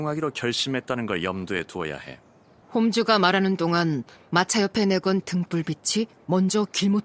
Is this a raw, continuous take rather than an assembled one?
no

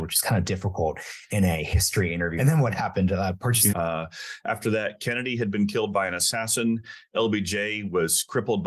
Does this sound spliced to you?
yes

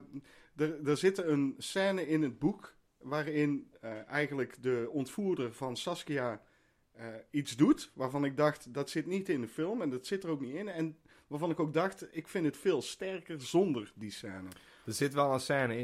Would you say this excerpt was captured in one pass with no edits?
yes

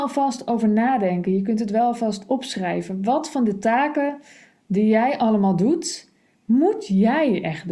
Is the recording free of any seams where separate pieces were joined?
yes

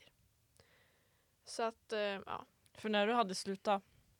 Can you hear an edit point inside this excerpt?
no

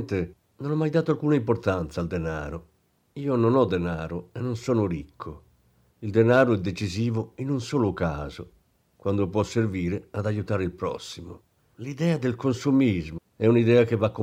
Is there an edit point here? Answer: yes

